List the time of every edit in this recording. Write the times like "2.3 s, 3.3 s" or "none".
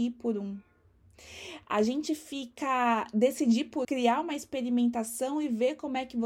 3.8 s

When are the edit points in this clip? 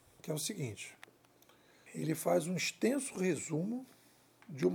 1.9 s

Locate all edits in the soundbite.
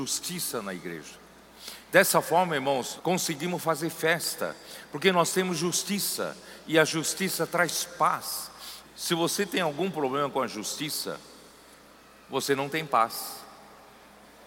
3.0 s, 8.8 s

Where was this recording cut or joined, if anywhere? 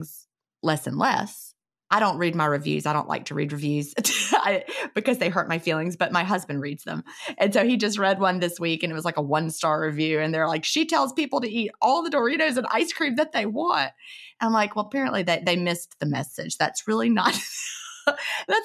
none

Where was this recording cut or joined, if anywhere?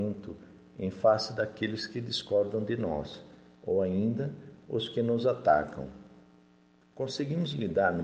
6.8 s

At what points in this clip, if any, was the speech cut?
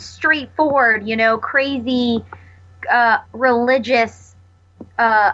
3.2 s

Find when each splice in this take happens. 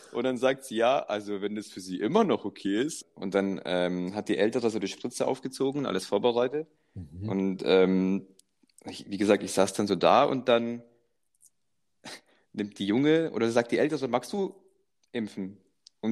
3.0 s

